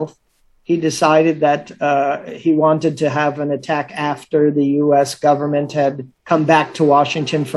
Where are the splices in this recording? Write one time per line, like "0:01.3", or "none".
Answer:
0:06.2